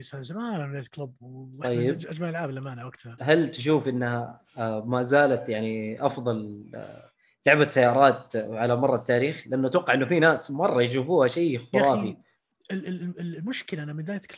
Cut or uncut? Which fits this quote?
cut